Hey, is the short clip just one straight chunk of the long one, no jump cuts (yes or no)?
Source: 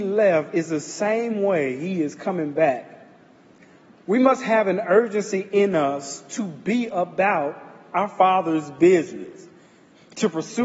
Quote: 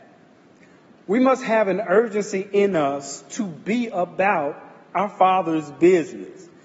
yes